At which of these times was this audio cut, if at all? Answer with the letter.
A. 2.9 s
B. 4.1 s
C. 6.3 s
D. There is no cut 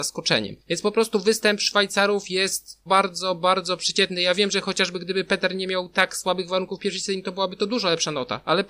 A